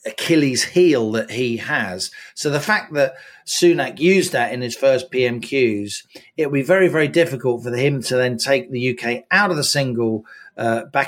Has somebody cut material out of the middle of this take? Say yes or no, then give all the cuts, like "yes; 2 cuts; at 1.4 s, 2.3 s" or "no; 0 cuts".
no; 0 cuts